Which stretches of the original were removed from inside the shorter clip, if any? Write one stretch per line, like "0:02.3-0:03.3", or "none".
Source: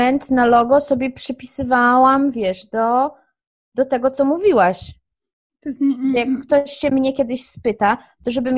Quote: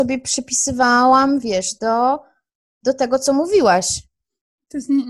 none